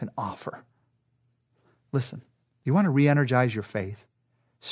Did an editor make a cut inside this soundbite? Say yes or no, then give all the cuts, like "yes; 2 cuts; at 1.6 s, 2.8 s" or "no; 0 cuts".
no; 0 cuts